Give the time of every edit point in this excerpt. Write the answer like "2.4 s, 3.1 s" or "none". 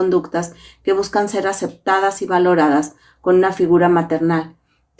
none